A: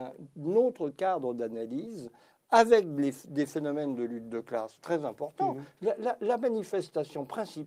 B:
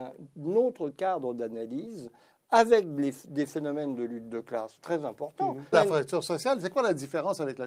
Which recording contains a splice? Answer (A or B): B